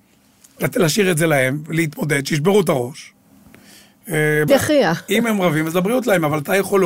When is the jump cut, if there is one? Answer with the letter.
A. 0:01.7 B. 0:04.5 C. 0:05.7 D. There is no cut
B